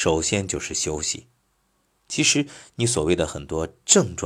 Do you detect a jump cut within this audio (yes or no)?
no